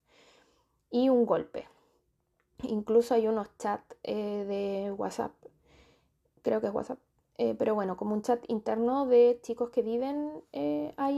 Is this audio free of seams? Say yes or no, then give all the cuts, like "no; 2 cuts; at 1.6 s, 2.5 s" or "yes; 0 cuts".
yes; 0 cuts